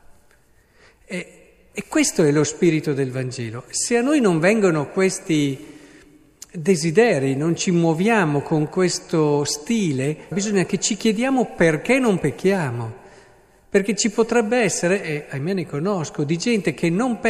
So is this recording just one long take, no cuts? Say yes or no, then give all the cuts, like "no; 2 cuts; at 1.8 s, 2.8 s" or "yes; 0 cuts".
no; 1 cut; at 10.3 s